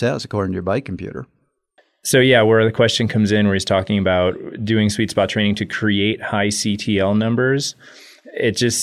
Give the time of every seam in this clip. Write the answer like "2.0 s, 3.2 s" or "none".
none

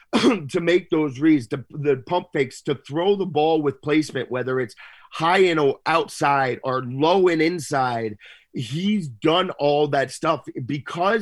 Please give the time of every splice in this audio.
none

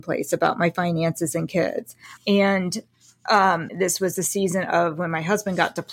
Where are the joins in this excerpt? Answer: 2.2 s, 3.7 s

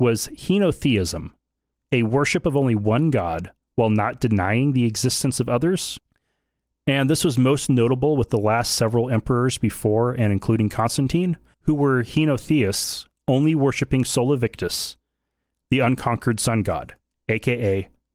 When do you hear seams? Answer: none

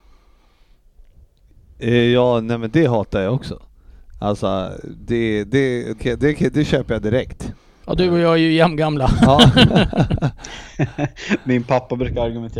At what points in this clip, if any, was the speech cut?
6.0 s, 7.8 s

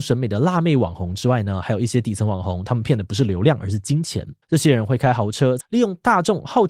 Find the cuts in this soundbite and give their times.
4.4 s, 5.6 s

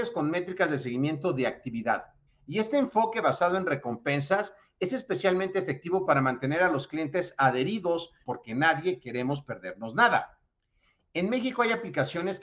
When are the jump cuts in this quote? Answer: 2.3 s, 8.2 s

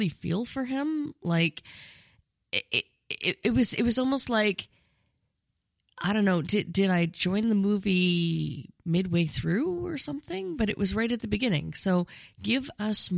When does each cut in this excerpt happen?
none

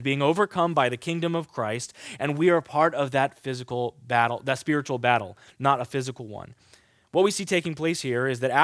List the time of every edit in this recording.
none

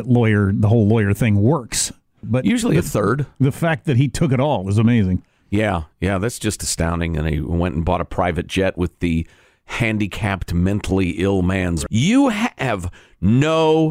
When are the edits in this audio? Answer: 2.2 s, 11.9 s

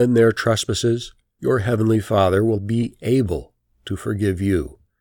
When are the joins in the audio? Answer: 2.6 s

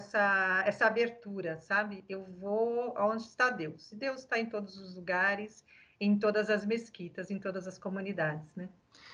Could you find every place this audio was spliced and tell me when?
none

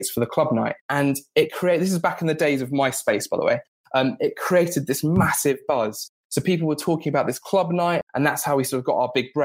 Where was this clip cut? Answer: 8.0 s

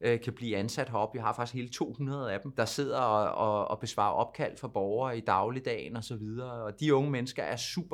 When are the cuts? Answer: none

